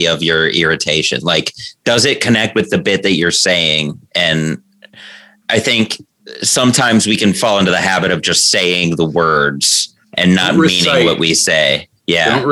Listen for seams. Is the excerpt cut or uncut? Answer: cut